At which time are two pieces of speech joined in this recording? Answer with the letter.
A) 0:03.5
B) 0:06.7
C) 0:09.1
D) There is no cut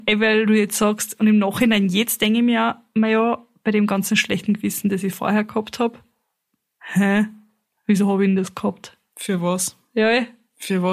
D